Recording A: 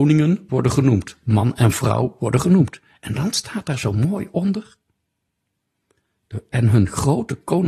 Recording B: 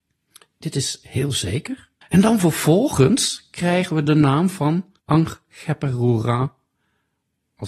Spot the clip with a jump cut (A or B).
B